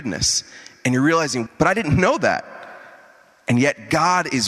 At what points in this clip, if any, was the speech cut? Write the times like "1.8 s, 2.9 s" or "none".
1.5 s